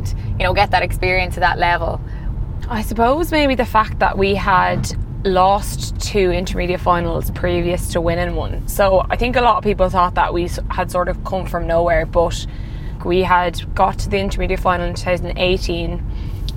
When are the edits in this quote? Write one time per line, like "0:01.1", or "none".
0:02.6
0:13.0